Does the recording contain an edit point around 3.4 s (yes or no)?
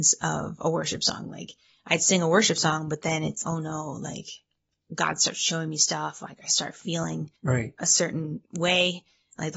yes